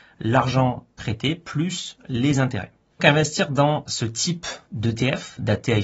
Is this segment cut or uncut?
cut